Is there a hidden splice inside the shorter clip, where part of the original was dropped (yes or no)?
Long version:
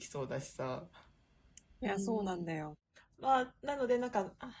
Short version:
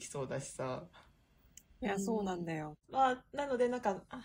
yes